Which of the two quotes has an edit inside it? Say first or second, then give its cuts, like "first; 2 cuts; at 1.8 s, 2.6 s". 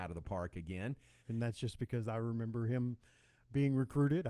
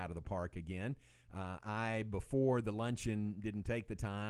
first; 1 cut; at 1.2 s